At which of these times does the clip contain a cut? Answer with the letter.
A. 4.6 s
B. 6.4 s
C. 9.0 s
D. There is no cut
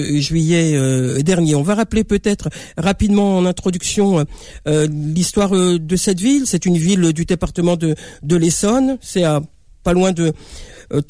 D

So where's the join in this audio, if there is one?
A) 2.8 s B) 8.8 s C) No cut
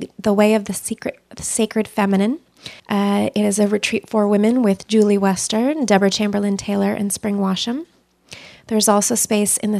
A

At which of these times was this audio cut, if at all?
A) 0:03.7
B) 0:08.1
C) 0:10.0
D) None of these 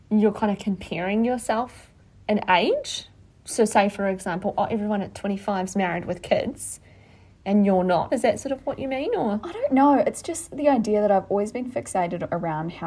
B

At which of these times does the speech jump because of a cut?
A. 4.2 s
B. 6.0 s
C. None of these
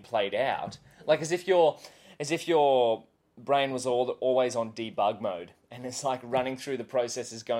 C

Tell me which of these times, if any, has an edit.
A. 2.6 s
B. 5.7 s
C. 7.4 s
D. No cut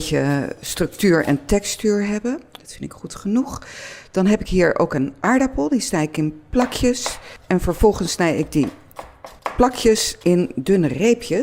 A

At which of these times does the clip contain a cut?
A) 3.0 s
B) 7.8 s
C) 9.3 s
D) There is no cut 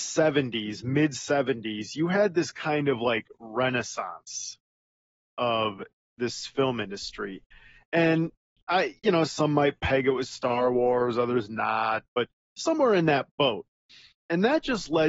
D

